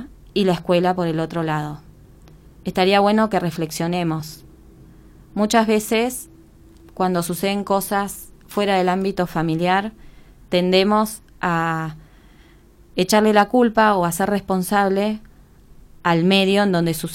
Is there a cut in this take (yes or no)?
no